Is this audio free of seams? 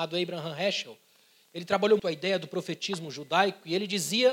no; 1 cut; at 2.0 s

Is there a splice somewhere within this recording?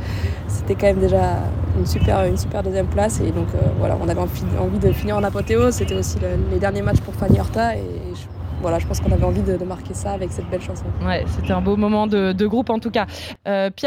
no; 0 cuts

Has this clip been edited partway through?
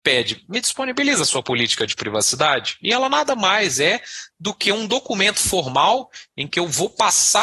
no; 0 cuts

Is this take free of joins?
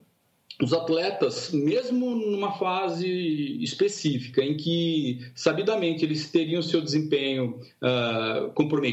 yes; 0 cuts

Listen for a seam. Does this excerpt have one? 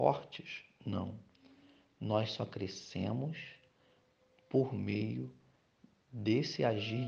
no; 0 cuts

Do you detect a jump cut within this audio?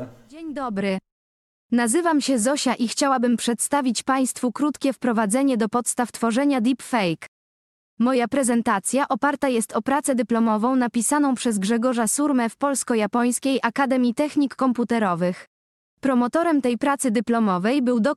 no; 0 cuts

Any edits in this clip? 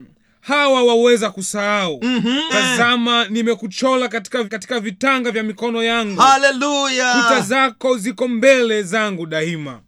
yes; 2 cuts; at 2.5 s, 4.4 s

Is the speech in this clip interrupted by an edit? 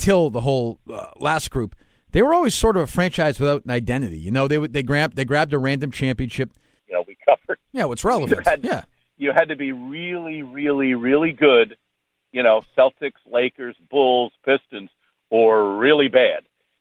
yes; 1 cut; at 6.8 s

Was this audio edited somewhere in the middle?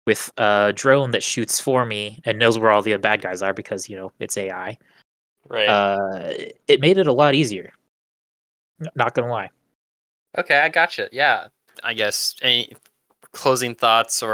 yes; 1 cut; at 11.7 s

